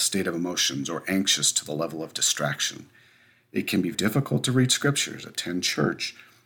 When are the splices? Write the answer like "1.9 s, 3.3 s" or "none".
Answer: 3.9 s